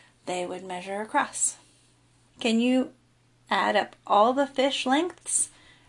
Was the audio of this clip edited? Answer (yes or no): yes